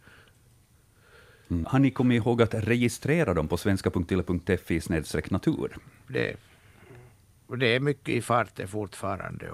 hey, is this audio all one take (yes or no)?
no